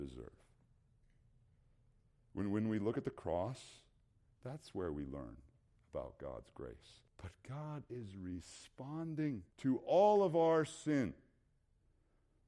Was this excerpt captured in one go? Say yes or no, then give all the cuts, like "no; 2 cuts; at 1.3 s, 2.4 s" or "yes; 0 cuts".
no; 2 cuts; at 7.1 s, 9.5 s